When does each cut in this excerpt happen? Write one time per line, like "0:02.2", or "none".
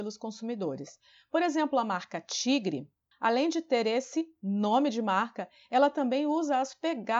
0:03.1